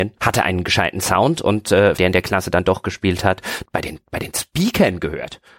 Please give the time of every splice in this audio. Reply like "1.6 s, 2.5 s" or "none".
2.0 s, 3.6 s

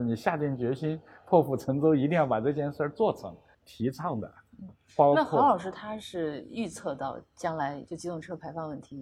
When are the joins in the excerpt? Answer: 3.5 s, 4.7 s

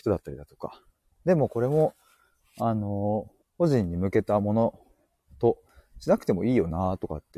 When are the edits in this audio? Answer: 1.1 s, 3.4 s

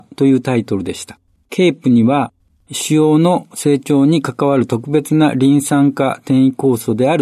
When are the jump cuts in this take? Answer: 1.4 s

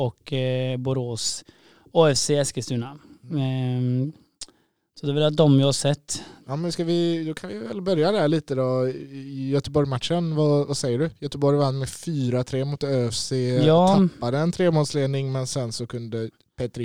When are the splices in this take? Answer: none

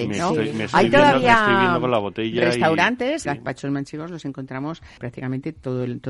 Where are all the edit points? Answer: 3.2 s, 5.0 s

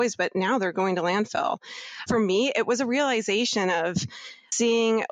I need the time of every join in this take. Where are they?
2.1 s

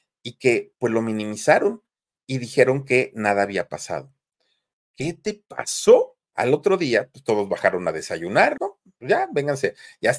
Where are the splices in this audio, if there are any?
4.7 s, 6.3 s, 8.6 s

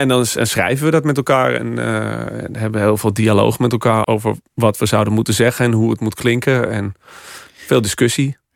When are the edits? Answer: 4.0 s

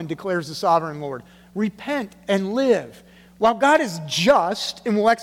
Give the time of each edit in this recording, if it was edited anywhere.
none

